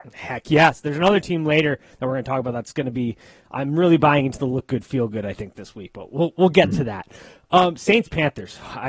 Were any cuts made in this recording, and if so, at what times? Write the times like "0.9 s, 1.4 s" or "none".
none